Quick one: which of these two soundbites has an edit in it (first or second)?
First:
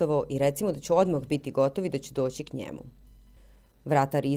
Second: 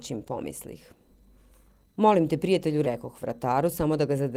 second